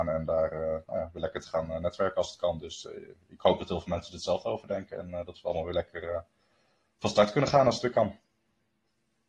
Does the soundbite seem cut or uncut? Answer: uncut